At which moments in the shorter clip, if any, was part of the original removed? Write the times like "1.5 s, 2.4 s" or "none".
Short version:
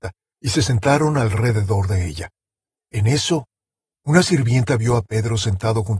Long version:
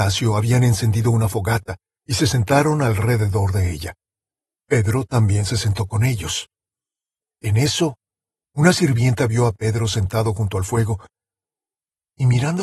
2.8 s